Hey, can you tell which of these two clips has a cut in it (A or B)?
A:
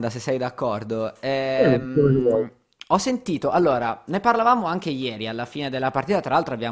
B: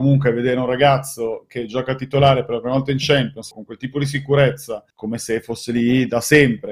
B